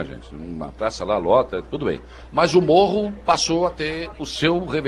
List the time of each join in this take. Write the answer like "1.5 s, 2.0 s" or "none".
none

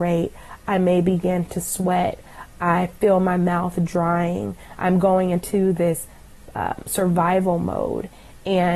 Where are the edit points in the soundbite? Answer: none

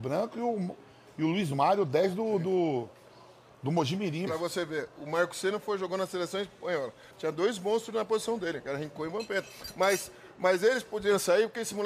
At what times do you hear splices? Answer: 4.3 s, 7.1 s

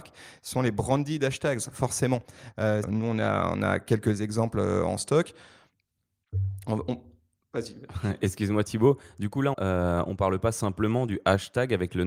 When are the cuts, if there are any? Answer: 2.8 s, 9.5 s

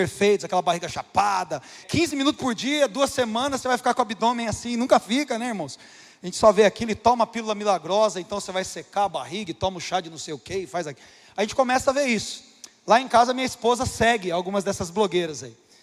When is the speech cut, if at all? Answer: 1.8 s

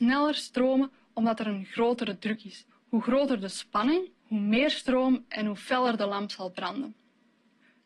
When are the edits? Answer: 2.7 s, 4.2 s

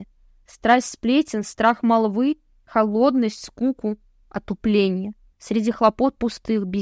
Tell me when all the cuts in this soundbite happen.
5.3 s

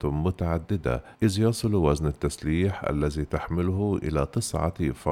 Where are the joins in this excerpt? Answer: 1.1 s

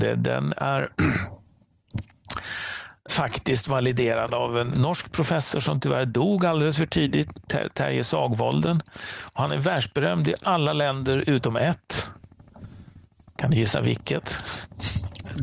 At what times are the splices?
3.1 s

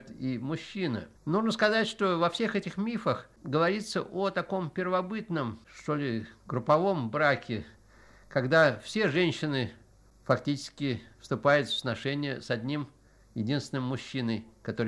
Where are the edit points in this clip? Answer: 1.2 s

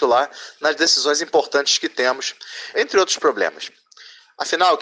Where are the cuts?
2.7 s

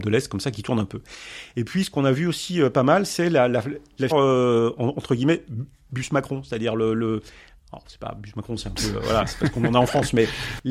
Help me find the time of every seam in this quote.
4.1 s

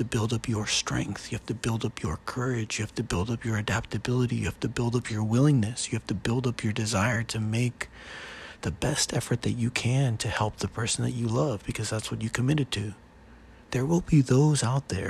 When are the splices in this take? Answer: 13.6 s

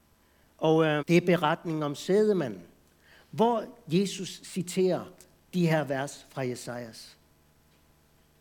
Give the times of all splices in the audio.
1.0 s

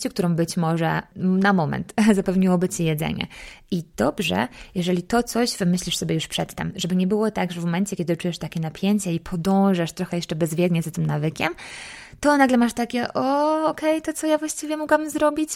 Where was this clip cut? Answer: none

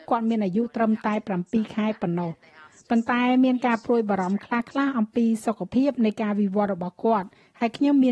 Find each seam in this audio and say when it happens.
none

